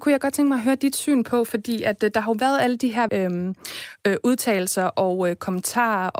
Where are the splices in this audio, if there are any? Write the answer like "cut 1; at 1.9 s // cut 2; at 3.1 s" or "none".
cut 1; at 3.1 s